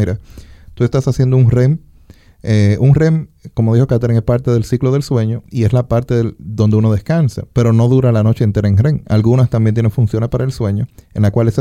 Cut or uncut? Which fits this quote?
cut